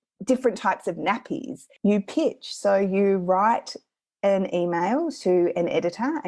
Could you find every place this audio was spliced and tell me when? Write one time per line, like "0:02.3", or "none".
0:01.8

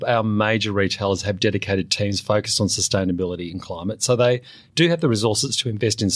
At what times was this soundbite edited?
none

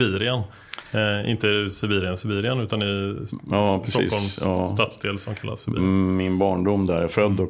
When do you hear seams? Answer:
none

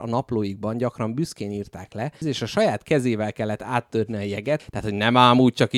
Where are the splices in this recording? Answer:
0:02.2
0:04.6

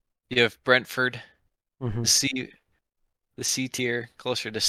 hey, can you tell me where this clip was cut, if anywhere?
none

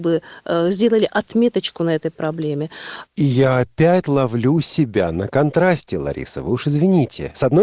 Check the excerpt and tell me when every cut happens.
0:03.1

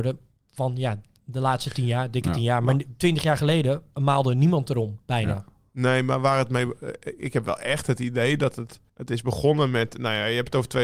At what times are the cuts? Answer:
0:08.9

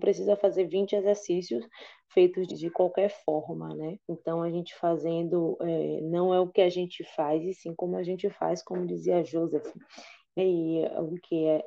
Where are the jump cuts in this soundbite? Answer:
0:02.5
0:04.0
0:10.4

